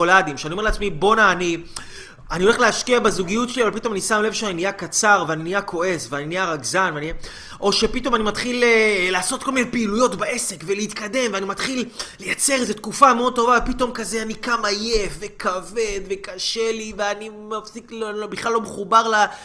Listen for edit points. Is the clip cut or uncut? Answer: uncut